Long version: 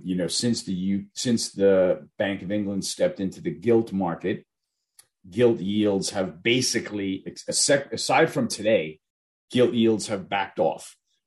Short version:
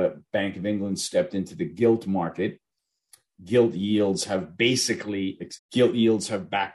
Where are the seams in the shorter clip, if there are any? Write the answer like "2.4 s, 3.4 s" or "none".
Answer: 5.6 s